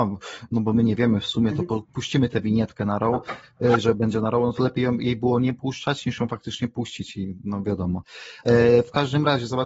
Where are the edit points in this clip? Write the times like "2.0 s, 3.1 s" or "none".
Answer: none

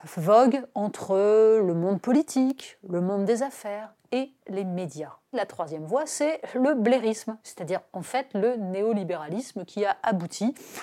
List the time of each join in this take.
5.3 s, 7.4 s

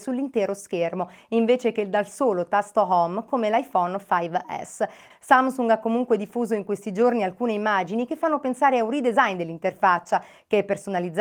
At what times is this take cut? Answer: 5.1 s

